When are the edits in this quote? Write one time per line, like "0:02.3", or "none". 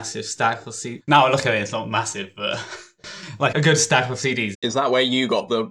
0:01.0
0:03.5
0:04.5

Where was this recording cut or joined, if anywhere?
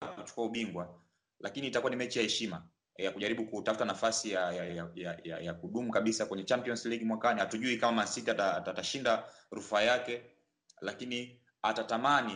0:04.7

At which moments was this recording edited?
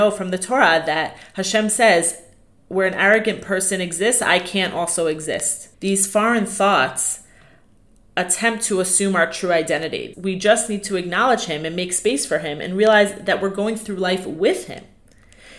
0:05.7
0:10.1

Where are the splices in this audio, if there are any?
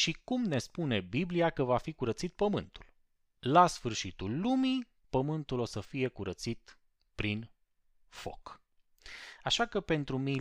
0:03.4
0:05.0

